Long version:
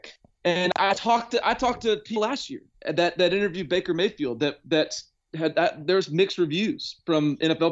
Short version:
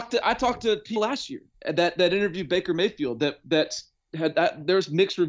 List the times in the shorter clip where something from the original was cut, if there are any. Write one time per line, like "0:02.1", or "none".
none